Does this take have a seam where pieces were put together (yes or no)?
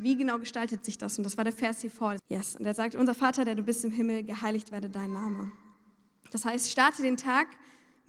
yes